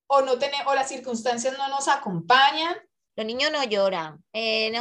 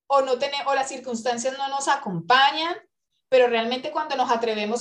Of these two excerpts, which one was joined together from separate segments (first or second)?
first